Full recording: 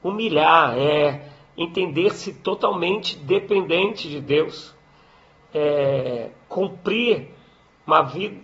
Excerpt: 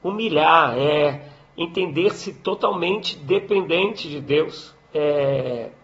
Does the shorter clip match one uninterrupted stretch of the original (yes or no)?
no